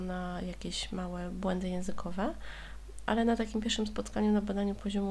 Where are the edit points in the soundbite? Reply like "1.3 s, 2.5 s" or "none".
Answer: none